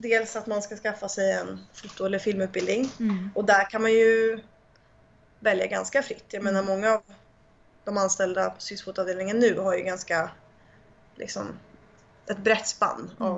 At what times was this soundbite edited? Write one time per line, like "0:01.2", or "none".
none